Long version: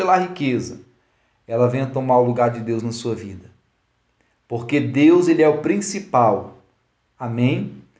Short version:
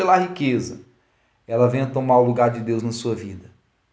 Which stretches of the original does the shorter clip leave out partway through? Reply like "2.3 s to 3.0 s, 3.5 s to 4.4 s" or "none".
none